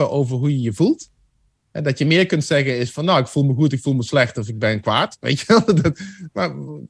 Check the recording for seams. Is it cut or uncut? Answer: cut